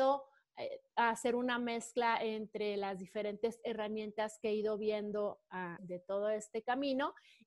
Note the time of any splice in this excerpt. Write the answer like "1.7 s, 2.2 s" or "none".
5.8 s

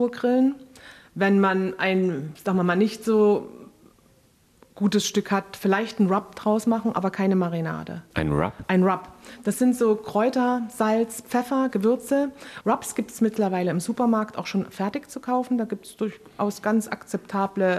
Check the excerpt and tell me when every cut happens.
12.6 s

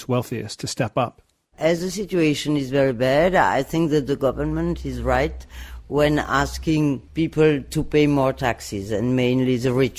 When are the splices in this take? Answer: 7.1 s

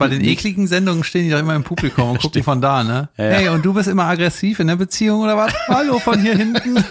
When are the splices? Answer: none

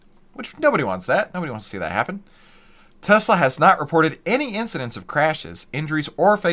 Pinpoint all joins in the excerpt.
none

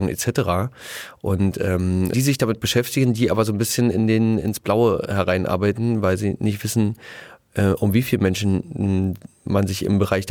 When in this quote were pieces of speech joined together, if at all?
2.1 s

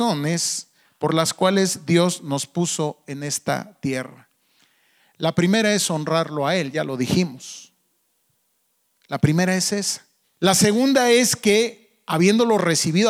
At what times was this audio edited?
10.2 s

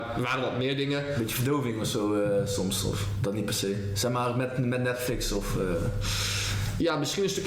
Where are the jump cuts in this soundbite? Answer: none

